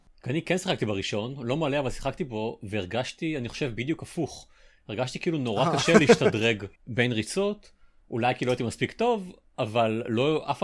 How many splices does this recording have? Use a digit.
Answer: 1